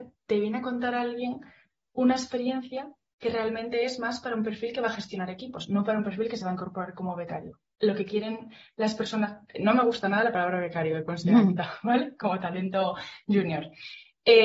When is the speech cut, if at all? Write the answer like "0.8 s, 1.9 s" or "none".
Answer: none